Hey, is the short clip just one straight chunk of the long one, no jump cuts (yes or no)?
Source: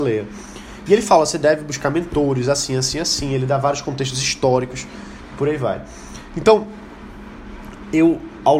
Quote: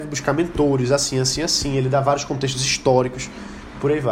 yes